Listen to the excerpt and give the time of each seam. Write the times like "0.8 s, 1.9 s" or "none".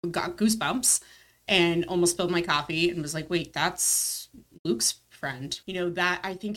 5.6 s